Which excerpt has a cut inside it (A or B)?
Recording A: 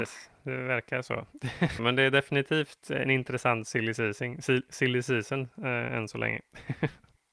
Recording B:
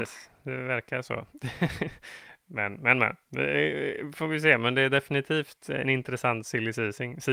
A